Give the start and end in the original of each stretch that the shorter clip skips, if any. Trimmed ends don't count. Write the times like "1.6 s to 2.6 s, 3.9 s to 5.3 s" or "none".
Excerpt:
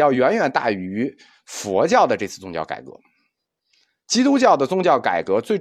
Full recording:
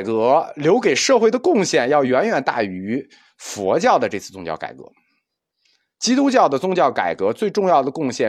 none